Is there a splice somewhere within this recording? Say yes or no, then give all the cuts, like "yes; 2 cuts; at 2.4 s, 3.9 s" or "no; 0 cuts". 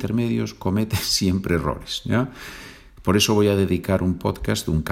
no; 0 cuts